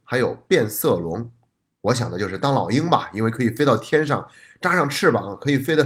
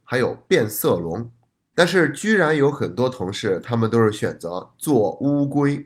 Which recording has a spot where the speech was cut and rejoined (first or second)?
second